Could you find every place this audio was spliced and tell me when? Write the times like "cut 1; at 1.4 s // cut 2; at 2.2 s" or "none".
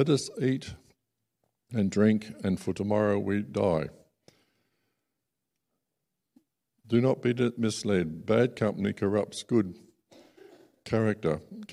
none